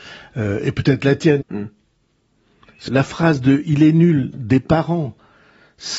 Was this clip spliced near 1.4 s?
yes; 2 cuts; at 1.4 s, 2.9 s

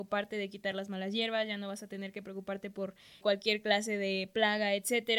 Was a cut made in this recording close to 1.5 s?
no; 1 cut; at 3.2 s

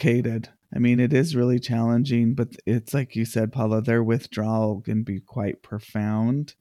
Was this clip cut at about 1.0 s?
no; 0 cuts

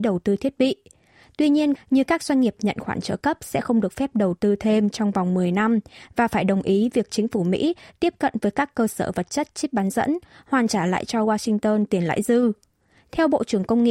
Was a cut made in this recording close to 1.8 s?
yes; 1 cut; at 1.8 s

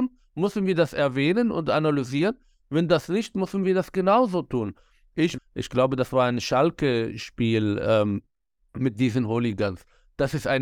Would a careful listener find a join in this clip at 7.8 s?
no; 1 cut; at 5.4 s

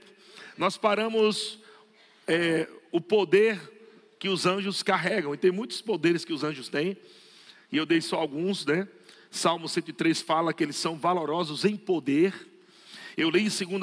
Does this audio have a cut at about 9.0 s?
no; 0 cuts

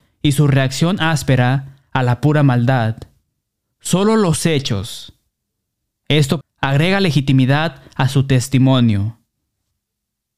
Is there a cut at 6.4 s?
yes; 1 cut; at 6.4 s

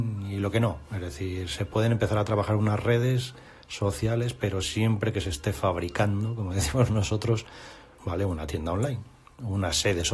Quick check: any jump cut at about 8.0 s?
yes; 1 cut; at 8.0 s

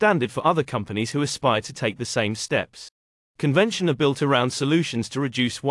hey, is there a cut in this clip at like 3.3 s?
yes; 1 cut; at 3.3 s

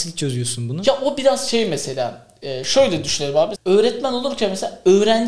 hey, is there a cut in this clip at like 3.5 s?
yes; 1 cut; at 3.5 s

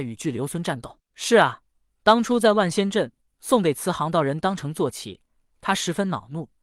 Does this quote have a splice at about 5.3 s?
no; 2 cuts; at 1.0 s, 3.3 s

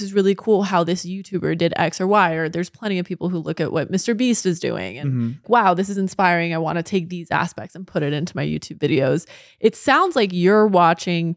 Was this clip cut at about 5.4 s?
yes; 1 cut; at 5.4 s

